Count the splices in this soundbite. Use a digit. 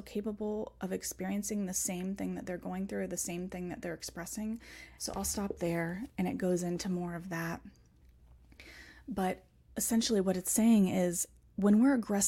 1